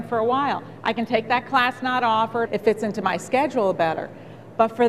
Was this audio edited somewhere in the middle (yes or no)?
yes